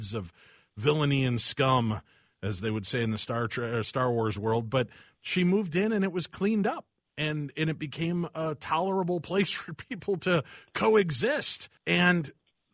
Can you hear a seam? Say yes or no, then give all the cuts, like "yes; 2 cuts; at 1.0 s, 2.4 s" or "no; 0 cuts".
yes; 1 cut; at 11.8 s